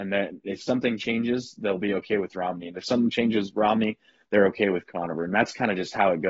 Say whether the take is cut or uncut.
uncut